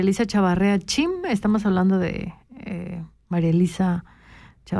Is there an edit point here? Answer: no; 0 cuts

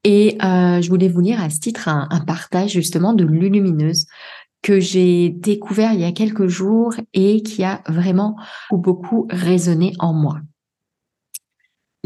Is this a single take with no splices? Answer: no; 1 cut; at 8.7 s

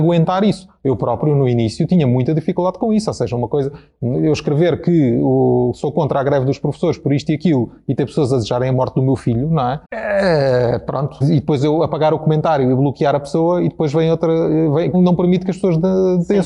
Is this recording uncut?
no; 3 cuts; at 9.8 s, 11.2 s, 14.9 s

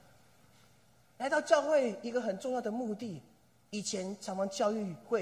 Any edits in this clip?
no; 0 cuts

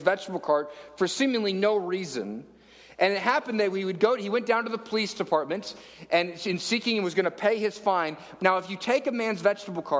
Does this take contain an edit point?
yes; 1 cut; at 8.4 s

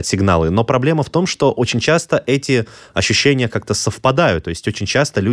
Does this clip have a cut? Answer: no; 0 cuts

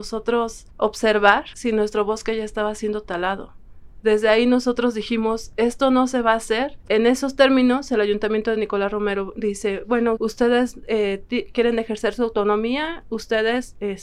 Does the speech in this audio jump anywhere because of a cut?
yes; 2 cuts; at 6.8 s, 10.2 s

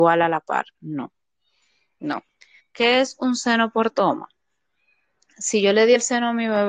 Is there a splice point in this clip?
yes; 1 cut; at 2.6 s

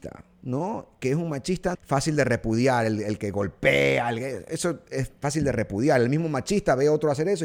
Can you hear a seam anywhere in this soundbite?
yes; 1 cut; at 1.7 s

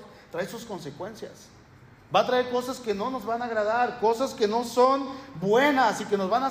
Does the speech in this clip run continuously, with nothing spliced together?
yes; 0 cuts

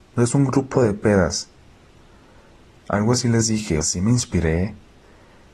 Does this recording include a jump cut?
yes; 1 cut; at 3.8 s

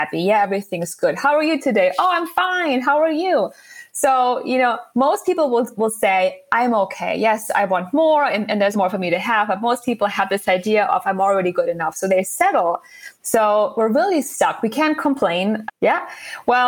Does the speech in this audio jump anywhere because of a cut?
yes; 3 cuts; at 8.7 s, 13.2 s, 15.7 s

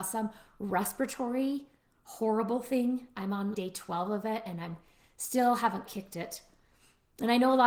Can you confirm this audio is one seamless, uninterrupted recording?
no; 2 cuts; at 3.5 s, 5.9 s

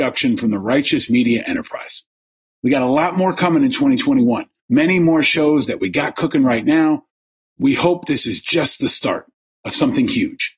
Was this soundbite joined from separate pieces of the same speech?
no; 0 cuts

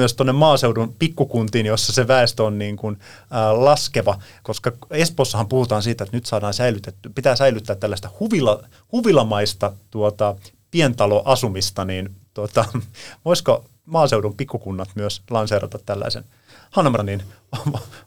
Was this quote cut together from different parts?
yes; 1 cut; at 17.0 s

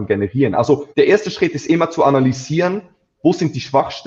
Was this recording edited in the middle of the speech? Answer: yes; 1 cut; at 0.9 s

